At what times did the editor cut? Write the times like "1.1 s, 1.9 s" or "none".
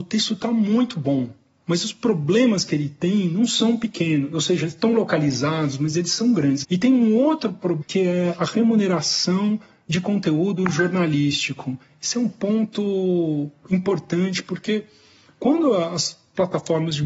6.6 s, 7.8 s